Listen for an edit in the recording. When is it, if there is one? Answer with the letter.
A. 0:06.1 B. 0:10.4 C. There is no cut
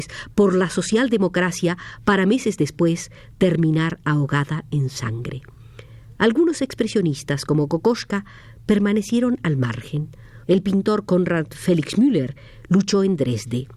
B